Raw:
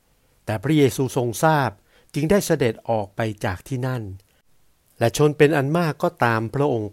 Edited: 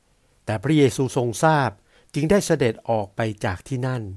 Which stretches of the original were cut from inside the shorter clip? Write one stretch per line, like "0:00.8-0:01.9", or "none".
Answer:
none